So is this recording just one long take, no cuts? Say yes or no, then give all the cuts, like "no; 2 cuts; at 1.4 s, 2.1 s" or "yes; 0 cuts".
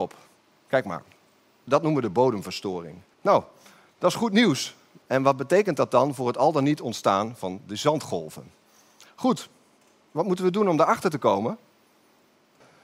no; 2 cuts; at 3.1 s, 5.0 s